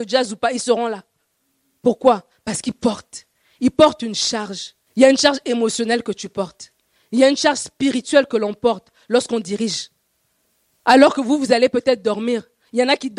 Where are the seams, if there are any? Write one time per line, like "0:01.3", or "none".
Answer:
0:04.9